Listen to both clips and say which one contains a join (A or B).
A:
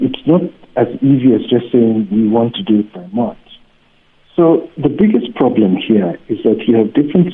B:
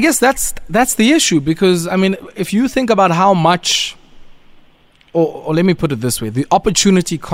A